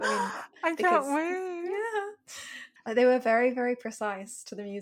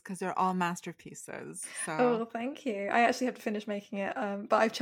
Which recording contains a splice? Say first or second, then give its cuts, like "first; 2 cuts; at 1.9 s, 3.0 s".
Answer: first; 1 cut; at 2.8 s